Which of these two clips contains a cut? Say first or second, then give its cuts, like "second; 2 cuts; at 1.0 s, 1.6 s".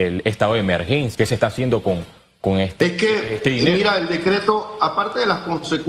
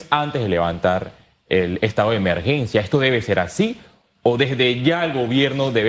first; 1 cut; at 1.1 s